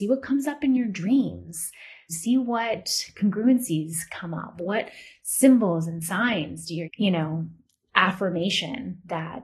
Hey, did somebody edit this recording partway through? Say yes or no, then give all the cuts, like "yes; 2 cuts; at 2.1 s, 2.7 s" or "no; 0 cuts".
yes; 3 cuts; at 2.1 s, 4.5 s, 6.8 s